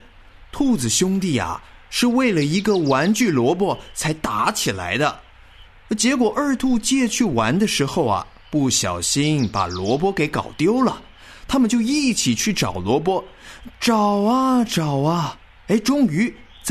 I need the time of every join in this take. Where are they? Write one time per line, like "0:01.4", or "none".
0:05.7